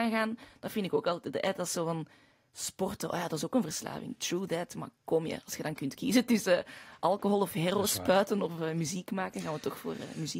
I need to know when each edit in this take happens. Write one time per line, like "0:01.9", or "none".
none